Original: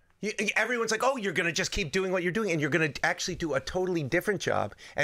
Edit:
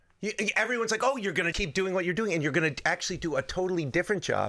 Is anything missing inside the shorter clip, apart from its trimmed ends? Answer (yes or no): yes